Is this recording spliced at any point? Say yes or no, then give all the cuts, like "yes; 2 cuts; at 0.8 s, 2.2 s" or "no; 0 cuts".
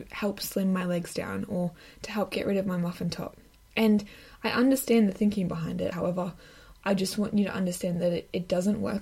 yes; 1 cut; at 5.9 s